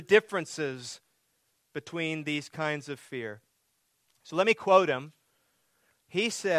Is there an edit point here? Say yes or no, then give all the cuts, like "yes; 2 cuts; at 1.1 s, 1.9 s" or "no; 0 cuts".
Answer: no; 0 cuts